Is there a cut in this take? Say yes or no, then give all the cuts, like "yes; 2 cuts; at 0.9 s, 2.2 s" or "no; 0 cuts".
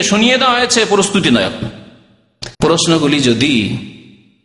yes; 1 cut; at 2.5 s